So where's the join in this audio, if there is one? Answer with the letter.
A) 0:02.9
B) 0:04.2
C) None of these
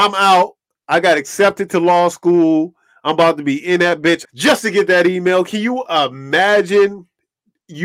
B